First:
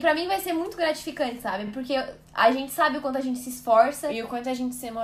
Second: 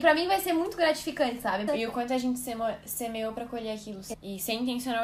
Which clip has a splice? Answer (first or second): second